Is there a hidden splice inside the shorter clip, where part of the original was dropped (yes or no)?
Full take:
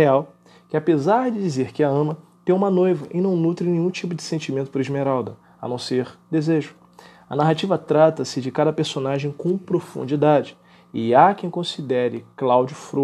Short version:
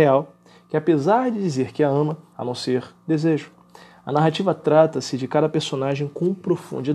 yes